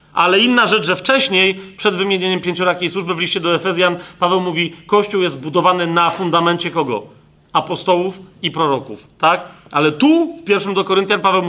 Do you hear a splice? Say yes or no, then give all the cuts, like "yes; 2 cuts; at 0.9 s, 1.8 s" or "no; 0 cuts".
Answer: no; 0 cuts